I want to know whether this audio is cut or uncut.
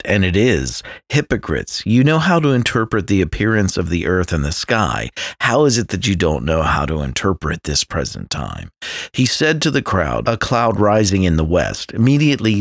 cut